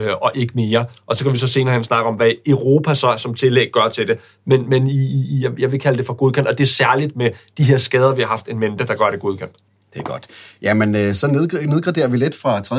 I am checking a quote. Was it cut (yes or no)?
no